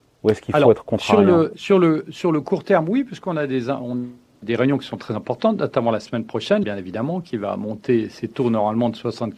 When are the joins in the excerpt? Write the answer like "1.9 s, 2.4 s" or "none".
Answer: 4.4 s, 6.6 s